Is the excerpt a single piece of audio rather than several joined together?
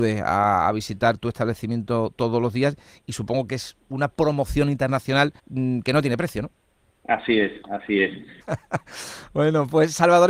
no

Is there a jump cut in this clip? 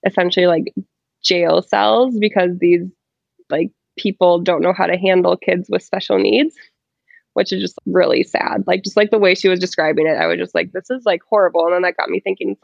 yes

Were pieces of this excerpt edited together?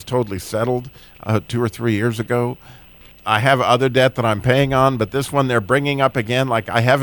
no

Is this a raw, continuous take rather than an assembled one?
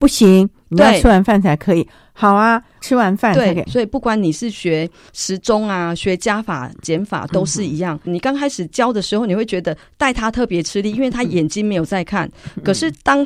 no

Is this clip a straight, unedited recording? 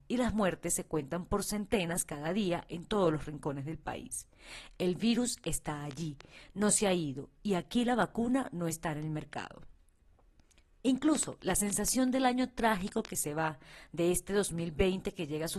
yes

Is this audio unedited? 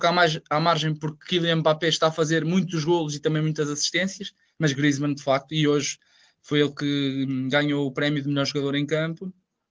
no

